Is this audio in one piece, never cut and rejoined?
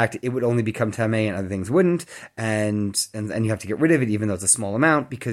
yes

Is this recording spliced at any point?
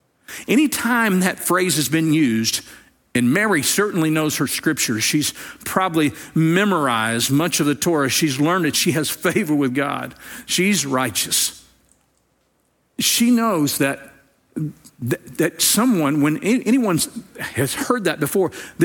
yes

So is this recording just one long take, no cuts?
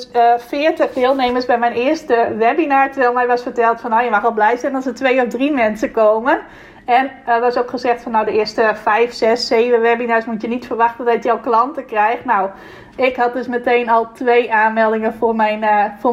yes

